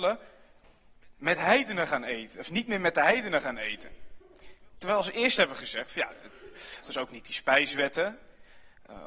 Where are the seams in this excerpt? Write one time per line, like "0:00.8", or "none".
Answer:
0:06.8